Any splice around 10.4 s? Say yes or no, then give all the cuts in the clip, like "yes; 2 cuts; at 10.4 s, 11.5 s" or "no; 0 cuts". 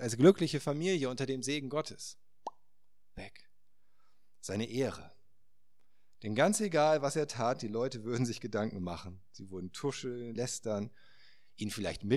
yes; 1 cut; at 10.4 s